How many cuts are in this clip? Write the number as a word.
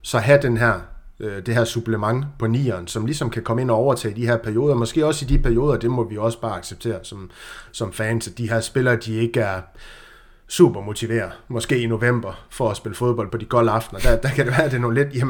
one